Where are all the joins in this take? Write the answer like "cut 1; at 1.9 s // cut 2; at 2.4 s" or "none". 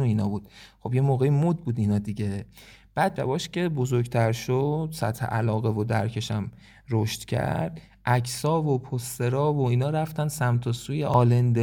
cut 1; at 3.2 s